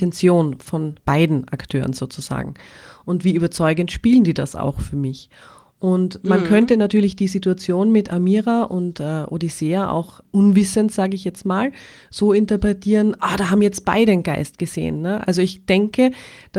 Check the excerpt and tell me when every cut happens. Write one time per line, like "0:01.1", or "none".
0:01.0